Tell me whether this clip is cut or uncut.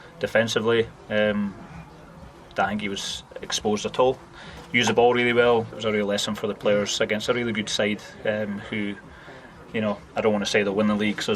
cut